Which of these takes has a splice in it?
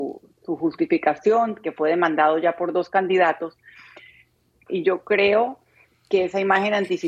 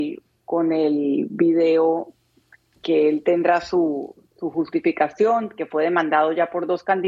first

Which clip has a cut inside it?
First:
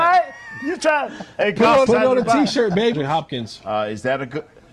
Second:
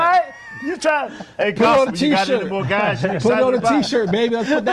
first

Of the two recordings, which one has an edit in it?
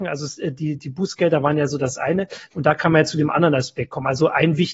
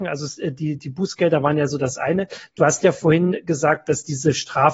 first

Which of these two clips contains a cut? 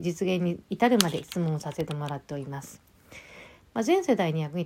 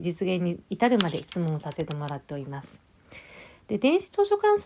first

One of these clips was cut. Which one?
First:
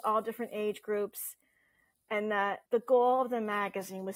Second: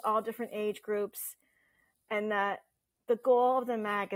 first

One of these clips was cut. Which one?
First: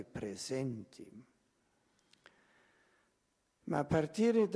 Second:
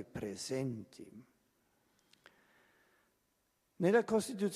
first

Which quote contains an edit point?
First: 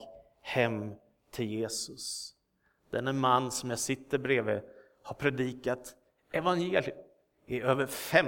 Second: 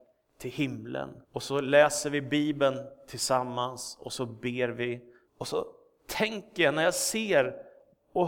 second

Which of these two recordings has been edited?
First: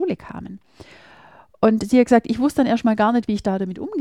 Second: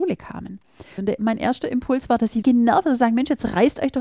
second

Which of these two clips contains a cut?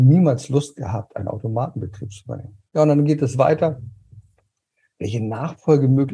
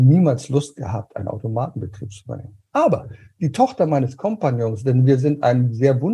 first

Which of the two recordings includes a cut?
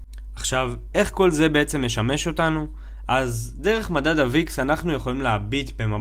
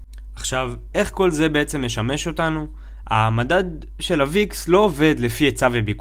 second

